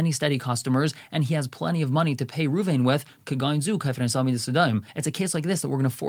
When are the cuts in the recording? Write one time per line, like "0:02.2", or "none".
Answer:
none